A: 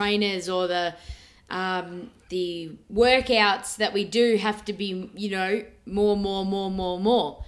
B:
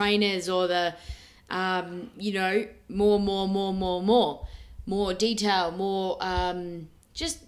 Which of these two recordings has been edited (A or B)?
B